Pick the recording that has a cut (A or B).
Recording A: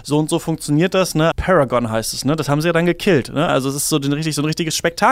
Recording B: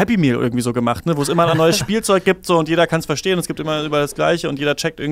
A